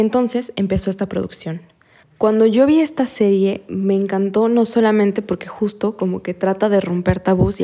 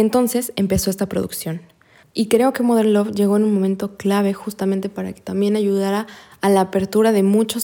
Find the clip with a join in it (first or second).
second